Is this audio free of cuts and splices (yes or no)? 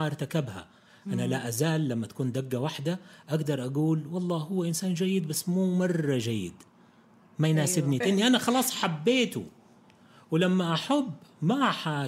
no